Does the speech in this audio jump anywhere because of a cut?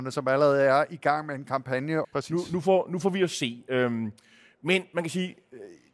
yes; 1 cut; at 2.0 s

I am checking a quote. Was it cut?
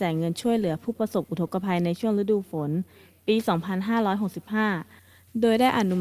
no; 0 cuts

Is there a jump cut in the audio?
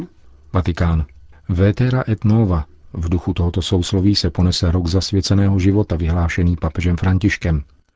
no; 0 cuts

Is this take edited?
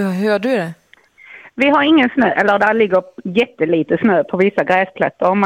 no; 0 cuts

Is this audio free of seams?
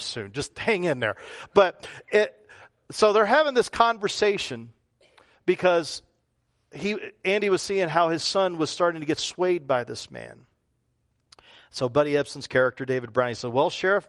yes; 0 cuts

